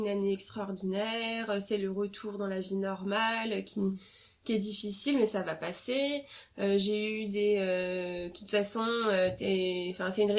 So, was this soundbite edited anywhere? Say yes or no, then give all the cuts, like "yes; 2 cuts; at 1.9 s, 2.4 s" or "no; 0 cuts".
no; 0 cuts